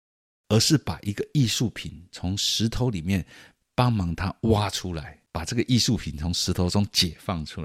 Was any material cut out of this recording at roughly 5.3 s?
yes; 1 cut; at 5.3 s

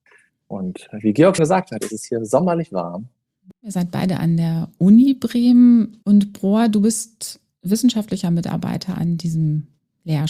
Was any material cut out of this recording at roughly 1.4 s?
yes; 2 cuts; at 1.4 s, 6.0 s

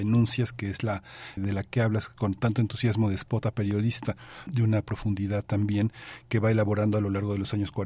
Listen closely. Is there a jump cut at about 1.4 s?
yes; 2 cuts; at 1.4 s, 4.5 s

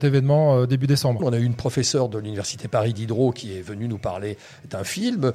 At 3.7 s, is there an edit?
no; 1 cut; at 1.2 s

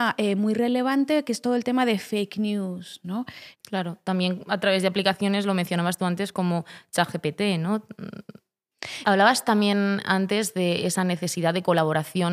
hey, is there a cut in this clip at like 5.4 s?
no; 2 cuts; at 3.5 s, 9.0 s

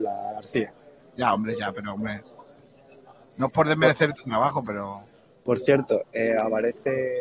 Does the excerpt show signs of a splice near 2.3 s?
no; 0 cuts

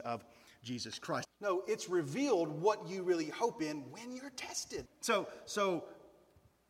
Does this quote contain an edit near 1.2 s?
yes; 2 cuts; at 1.2 s, 4.9 s

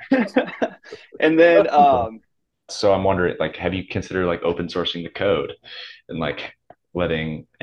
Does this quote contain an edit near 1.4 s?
no; 1 cut; at 2.7 s

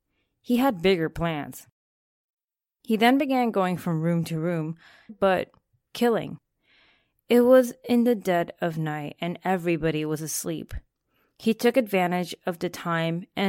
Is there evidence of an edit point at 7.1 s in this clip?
no; 1 cut; at 5.1 s

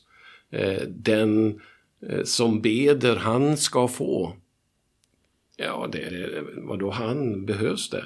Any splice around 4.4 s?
no; 1 cut; at 6.1 s

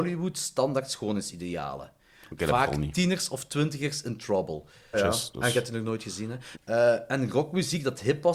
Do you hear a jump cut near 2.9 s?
no; 2 cuts; at 4.9 s, 6.5 s

